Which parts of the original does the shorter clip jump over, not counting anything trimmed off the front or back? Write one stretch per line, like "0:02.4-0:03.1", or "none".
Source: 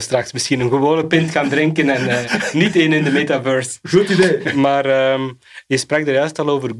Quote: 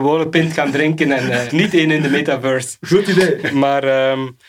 0:02.3-0:02.5